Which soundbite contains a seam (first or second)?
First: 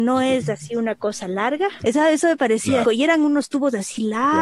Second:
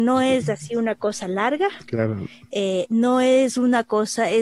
first